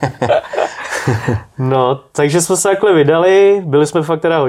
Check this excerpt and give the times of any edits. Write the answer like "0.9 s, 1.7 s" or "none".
none

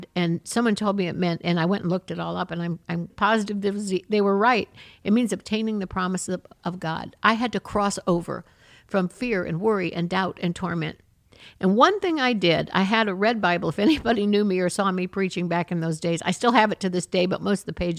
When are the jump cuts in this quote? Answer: 3.1 s

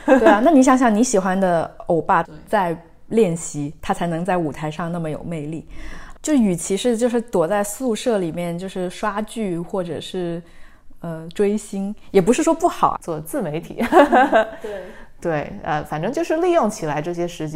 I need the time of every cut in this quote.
2.2 s, 6.2 s, 13.0 s

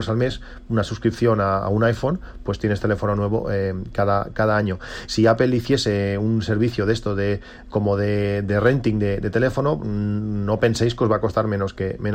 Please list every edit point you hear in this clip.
5.1 s

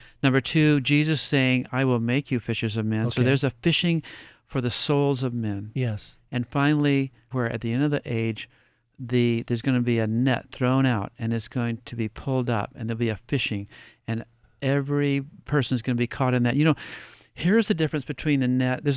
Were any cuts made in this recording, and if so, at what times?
7.3 s

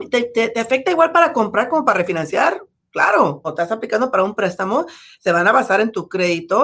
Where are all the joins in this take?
3.4 s

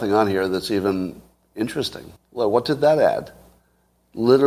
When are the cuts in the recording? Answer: 2.2 s

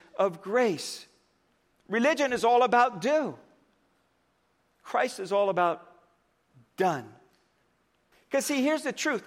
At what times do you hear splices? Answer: 8.1 s

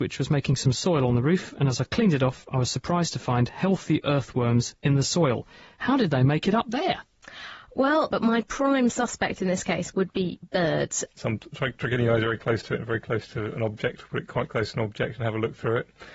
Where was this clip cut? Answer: 8.1 s, 11.2 s

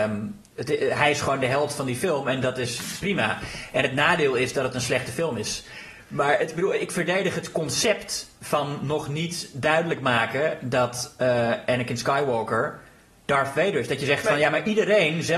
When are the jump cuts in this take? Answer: none

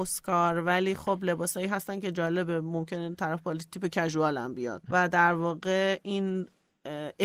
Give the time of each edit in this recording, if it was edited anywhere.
4.9 s

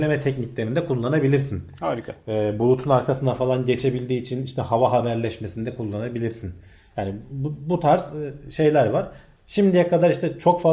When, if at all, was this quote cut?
none

